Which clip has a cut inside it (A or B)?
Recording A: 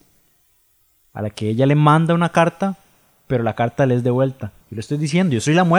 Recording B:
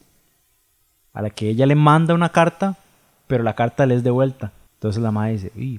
A